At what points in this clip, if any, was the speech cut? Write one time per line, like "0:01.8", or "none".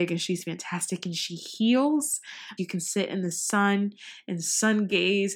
0:02.6